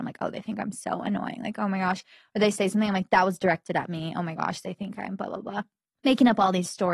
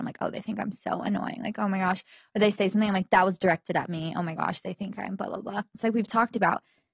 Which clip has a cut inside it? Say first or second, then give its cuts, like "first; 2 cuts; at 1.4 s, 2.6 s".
second; 1 cut; at 5.7 s